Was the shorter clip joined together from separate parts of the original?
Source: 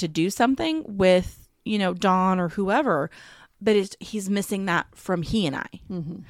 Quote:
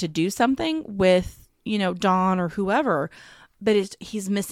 no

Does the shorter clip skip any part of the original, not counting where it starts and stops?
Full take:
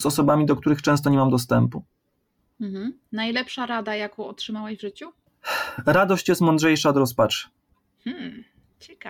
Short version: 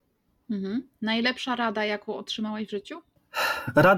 no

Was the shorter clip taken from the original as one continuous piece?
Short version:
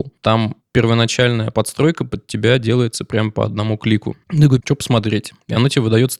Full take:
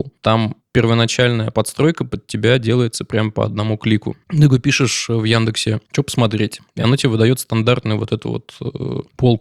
no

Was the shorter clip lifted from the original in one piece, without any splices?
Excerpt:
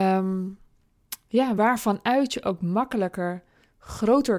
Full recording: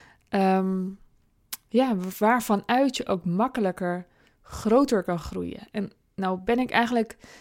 no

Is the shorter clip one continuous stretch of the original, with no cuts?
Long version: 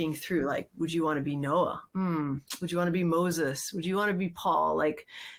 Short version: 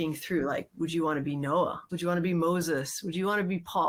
no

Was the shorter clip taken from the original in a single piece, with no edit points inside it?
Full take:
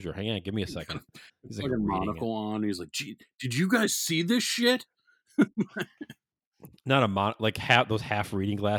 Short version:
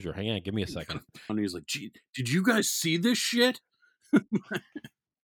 no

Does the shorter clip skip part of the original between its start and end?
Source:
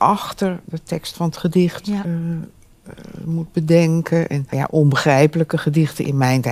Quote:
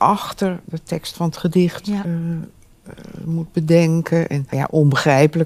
no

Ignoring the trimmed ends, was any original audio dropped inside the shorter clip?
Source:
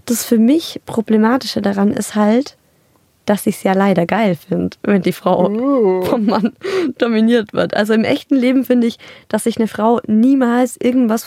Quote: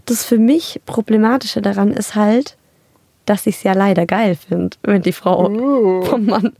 no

